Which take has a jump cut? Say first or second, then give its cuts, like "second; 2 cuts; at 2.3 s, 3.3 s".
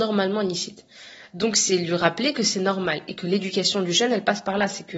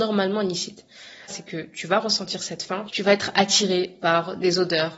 second; 2 cuts; at 1.3 s, 2.9 s